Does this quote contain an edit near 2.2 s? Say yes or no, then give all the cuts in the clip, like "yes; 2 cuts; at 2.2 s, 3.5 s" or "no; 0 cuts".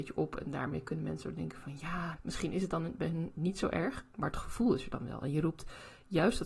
yes; 1 cut; at 2.2 s